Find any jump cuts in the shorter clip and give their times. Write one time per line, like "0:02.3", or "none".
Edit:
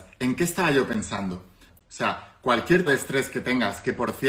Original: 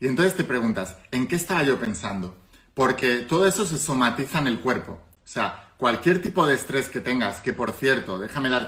0:01.7
0:02.9